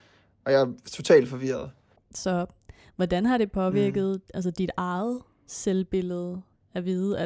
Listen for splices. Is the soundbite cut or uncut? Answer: cut